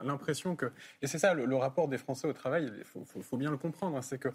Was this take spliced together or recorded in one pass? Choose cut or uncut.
uncut